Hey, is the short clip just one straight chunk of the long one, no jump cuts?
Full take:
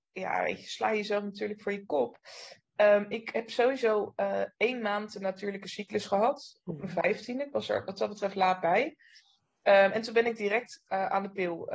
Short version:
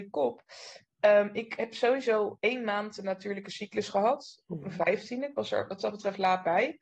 no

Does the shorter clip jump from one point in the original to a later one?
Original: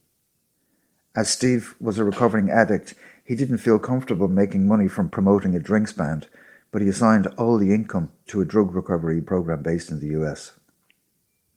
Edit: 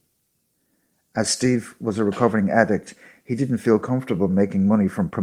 no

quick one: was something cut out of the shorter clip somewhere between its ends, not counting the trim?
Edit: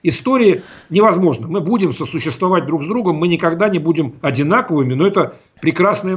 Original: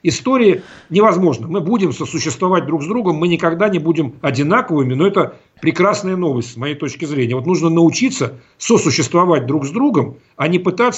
no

